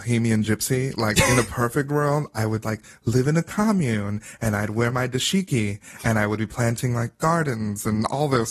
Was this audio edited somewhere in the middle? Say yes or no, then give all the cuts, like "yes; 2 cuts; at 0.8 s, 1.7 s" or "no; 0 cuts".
yes; 1 cut; at 2.6 s